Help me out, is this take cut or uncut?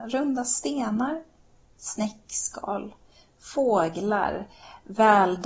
uncut